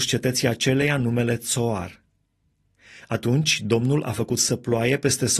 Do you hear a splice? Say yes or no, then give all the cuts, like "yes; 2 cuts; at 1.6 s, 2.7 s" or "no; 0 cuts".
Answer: yes; 1 cut; at 3.0 s